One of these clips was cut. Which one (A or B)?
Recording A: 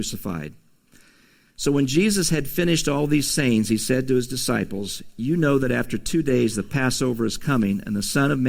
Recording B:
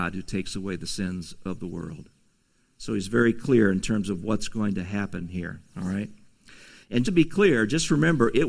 B